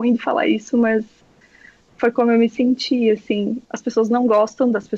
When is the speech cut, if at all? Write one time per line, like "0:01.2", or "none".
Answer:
0:03.6